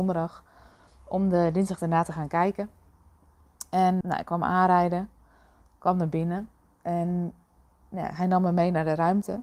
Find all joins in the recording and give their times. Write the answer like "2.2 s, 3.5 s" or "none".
4.0 s